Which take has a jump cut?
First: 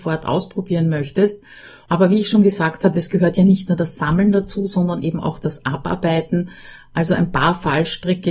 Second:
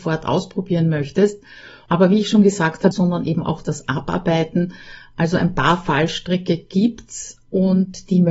second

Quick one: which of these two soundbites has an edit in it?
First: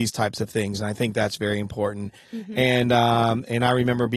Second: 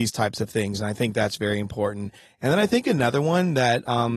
first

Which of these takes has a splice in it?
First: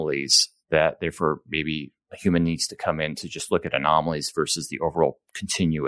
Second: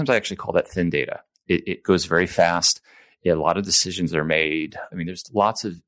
second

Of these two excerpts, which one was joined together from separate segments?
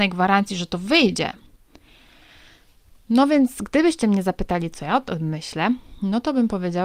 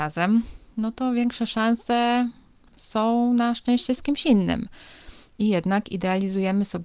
second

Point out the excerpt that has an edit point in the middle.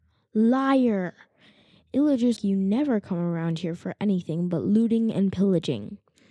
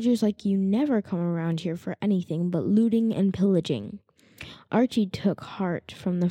first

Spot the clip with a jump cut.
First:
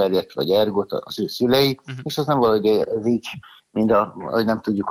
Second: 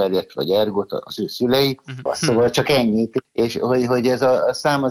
second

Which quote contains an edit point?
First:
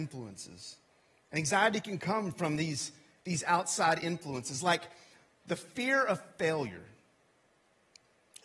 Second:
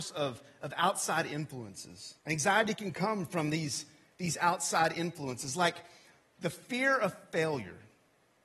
second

